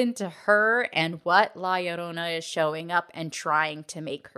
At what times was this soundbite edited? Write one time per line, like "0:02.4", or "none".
none